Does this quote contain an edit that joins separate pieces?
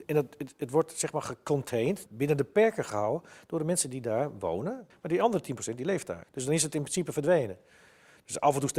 yes; 3 cuts; at 2.1 s, 4.9 s, 6.2 s

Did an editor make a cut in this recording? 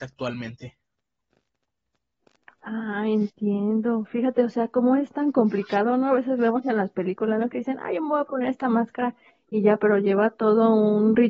no; 0 cuts

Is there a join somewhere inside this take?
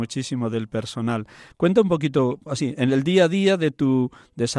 yes; 1 cut; at 1.5 s

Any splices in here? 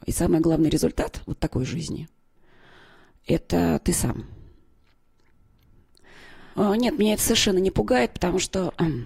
yes; 1 cut; at 6.5 s

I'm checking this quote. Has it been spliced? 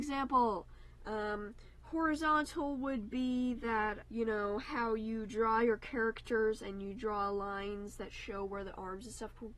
yes; 1 cut; at 4.0 s

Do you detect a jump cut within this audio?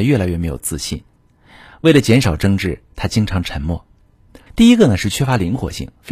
yes; 1 cut; at 4.5 s

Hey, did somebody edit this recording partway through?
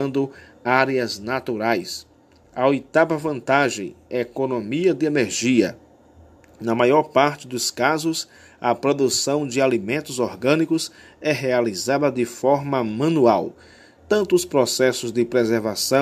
no; 0 cuts

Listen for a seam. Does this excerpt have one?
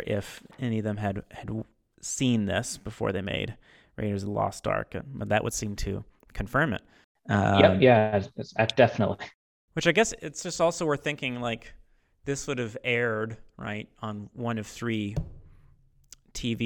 no; 0 cuts

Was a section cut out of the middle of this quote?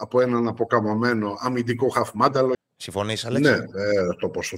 yes; 1 cut; at 2.5 s

